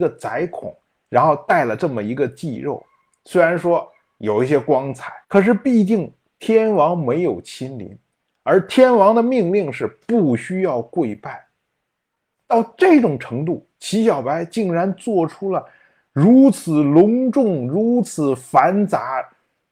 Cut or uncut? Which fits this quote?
cut